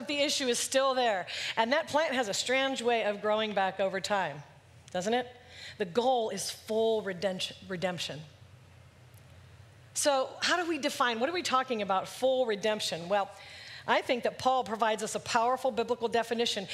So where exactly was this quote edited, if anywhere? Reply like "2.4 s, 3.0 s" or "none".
none